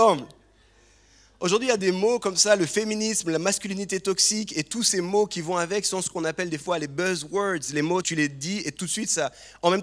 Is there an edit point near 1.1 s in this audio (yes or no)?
no